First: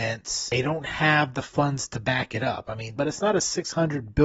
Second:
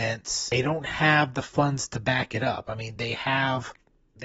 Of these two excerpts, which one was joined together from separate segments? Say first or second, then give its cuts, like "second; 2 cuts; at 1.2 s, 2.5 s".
first; 1 cut; at 3.0 s